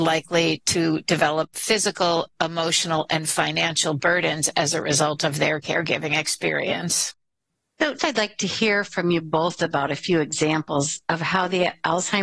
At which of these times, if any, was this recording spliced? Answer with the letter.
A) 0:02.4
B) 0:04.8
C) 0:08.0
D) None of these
C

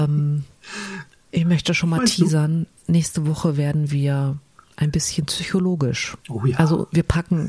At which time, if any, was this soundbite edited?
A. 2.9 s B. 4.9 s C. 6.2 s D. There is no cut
C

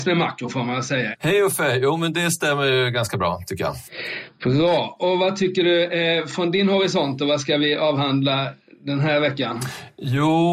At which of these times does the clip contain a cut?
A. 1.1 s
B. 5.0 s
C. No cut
A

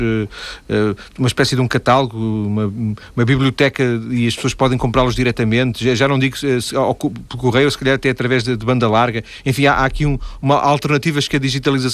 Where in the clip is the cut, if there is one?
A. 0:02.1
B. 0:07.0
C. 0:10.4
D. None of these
D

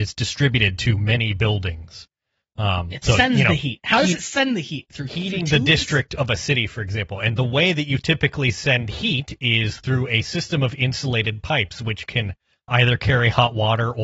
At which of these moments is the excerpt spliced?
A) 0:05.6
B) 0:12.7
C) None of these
B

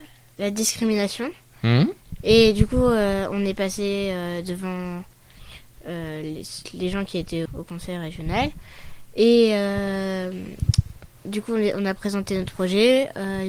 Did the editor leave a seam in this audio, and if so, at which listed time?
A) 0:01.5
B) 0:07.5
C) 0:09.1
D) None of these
B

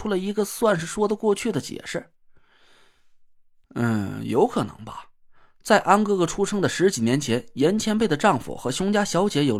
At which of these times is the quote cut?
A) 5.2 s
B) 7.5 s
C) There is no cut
C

